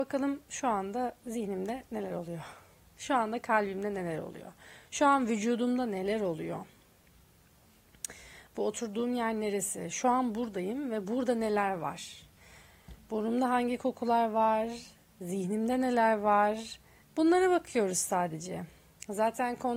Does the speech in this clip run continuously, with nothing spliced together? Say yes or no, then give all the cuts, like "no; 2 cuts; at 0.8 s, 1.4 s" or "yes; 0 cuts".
no; 1 cut; at 17.0 s